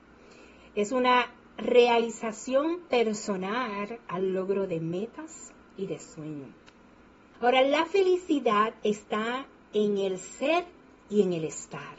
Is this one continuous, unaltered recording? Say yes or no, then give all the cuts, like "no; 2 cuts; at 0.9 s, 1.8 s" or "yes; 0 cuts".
yes; 0 cuts